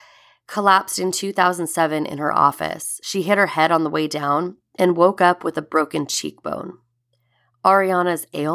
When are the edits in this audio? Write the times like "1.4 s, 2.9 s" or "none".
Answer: 4.6 s